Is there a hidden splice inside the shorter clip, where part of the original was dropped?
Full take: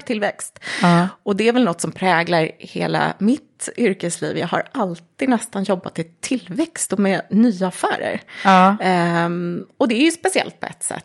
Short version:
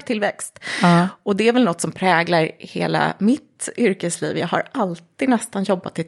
no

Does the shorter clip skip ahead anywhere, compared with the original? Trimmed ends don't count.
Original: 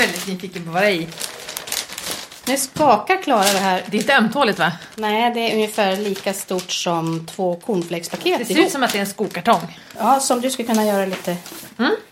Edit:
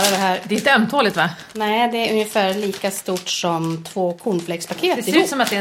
no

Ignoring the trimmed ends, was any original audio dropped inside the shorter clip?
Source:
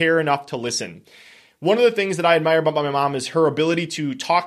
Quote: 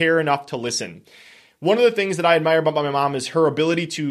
no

